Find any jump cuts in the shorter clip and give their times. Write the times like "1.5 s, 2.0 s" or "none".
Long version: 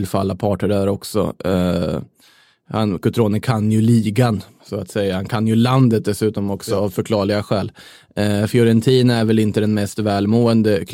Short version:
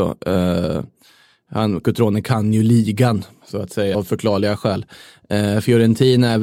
3.9 s